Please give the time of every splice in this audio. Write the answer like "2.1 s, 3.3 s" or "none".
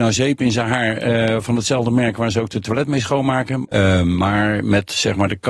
3.6 s